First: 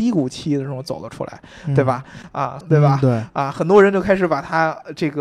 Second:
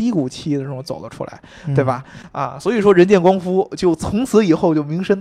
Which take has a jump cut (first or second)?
first